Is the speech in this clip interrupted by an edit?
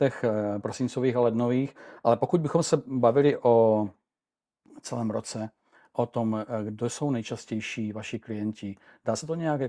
no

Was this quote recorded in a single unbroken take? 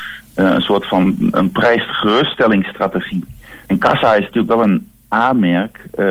no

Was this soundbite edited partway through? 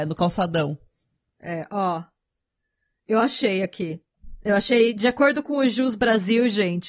no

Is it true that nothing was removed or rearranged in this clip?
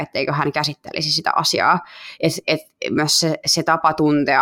yes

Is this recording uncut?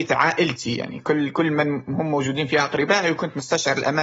yes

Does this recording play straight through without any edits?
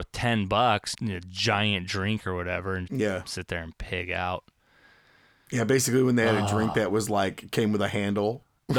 no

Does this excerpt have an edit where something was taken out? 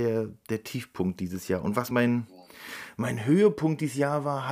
no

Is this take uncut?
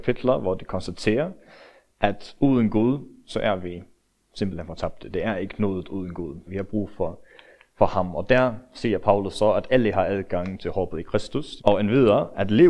no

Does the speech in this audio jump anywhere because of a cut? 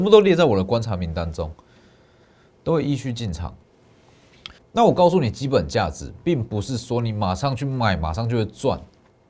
yes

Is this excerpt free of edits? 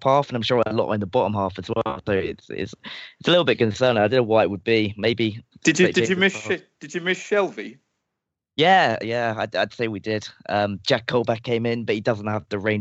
yes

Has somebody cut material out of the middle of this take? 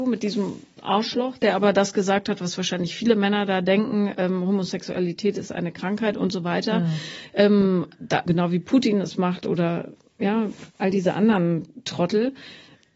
yes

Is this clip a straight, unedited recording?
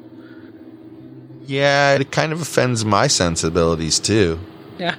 no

